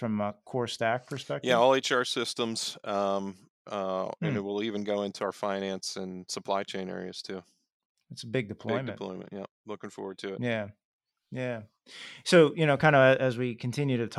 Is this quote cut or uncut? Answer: uncut